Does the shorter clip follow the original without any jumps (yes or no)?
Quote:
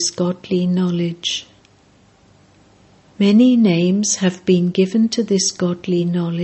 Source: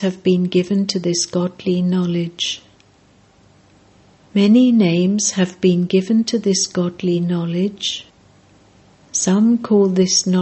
yes